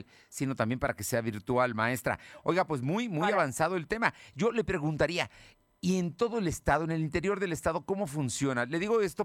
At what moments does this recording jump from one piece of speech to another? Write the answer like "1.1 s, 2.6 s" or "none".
none